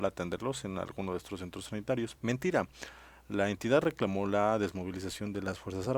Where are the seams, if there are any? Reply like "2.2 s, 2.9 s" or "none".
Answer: 2.2 s